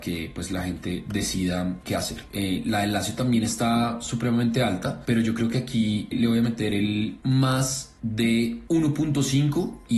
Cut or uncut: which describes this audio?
cut